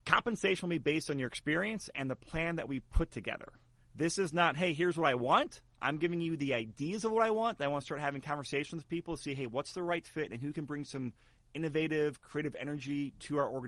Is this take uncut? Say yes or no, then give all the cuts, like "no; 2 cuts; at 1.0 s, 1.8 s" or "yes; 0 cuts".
yes; 0 cuts